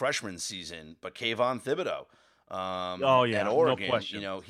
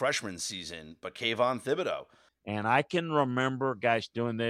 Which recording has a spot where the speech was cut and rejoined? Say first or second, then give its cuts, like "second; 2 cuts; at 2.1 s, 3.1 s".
second; 1 cut; at 2.3 s